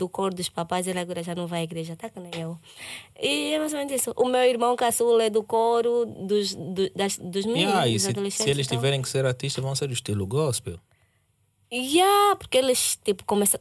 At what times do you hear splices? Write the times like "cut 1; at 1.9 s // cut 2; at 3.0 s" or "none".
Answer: none